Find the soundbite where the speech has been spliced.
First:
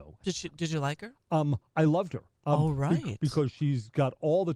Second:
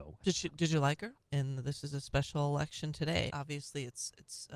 second; 2 cuts; at 1.2 s, 3.3 s

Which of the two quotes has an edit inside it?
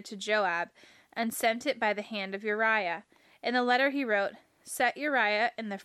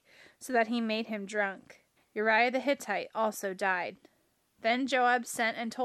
second; 1 cut; at 2.0 s

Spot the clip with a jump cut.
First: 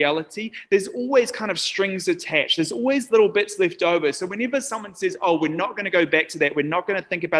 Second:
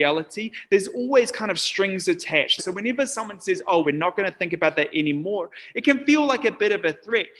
second; 2 cuts; at 2.6 s, 3.8 s

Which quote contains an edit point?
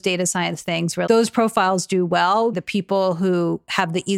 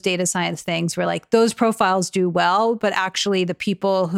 first; 2 cuts; at 1.1 s, 2.5 s

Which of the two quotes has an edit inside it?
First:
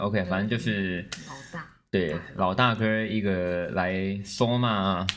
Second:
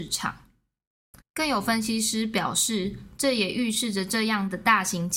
second; 1 cut; at 1.2 s

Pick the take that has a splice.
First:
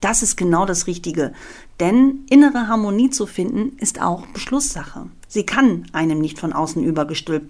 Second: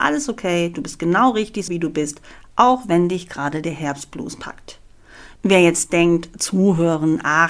second; 1 cut; at 1.7 s

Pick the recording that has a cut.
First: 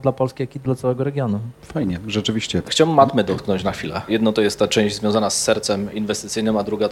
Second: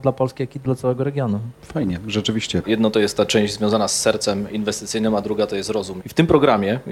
second; 2 cuts; at 2.6 s, 6.0 s

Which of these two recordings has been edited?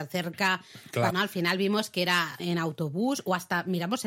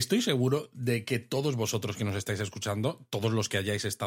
first; 2 cuts; at 1.1 s, 2.4 s

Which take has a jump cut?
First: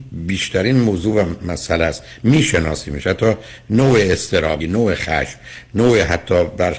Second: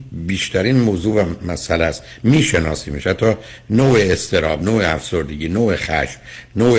first; 1 cut; at 4.6 s

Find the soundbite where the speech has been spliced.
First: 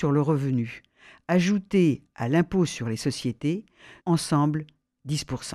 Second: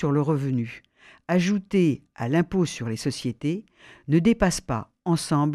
first; 1 cut; at 4.0 s

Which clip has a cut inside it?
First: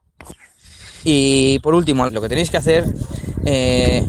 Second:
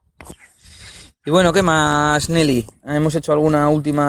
first; 2 cuts; at 1.0 s, 2.1 s

